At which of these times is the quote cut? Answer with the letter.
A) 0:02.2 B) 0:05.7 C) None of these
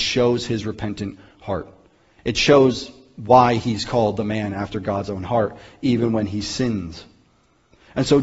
C